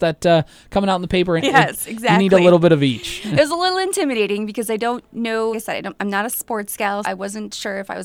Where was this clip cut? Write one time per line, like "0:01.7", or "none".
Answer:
0:01.4
0:05.5
0:07.0